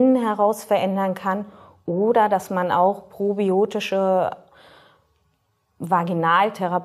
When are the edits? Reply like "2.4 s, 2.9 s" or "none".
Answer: none